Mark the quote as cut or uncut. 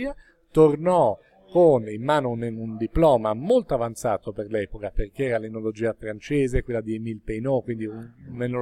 uncut